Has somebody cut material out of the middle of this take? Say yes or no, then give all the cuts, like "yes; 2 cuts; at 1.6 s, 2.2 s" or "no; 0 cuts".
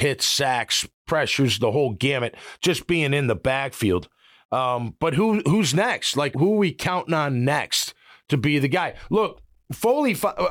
yes; 1 cut; at 6.3 s